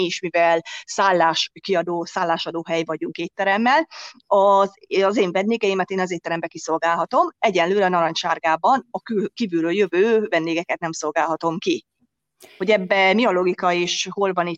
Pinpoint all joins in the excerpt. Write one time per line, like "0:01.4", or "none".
none